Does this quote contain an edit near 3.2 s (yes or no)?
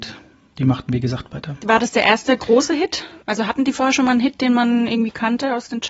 yes